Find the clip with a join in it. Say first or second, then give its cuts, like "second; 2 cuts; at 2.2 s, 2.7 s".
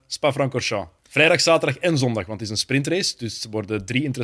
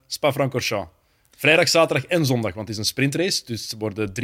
first; 1 cut; at 1.0 s